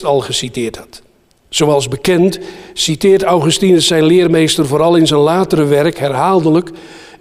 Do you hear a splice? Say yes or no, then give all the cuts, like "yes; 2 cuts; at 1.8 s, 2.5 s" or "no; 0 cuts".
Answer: no; 0 cuts